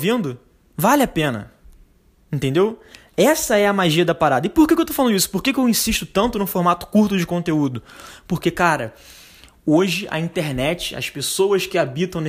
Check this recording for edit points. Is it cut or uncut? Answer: uncut